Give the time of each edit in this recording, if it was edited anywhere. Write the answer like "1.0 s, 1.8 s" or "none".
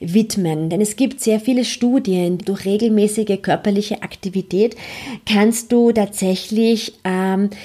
2.4 s